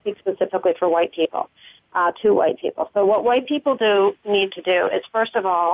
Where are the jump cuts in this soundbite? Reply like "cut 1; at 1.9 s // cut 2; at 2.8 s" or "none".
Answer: none